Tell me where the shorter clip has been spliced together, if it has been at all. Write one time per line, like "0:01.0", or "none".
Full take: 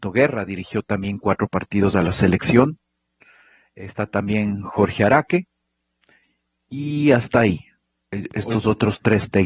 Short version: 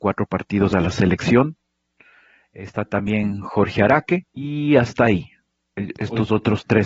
0:04.3